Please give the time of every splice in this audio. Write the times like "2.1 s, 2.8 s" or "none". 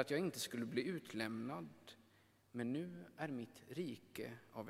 none